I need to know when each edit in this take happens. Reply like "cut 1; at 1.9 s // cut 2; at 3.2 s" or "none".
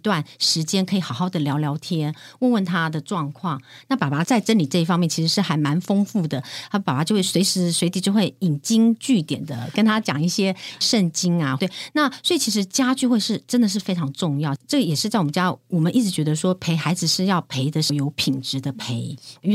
none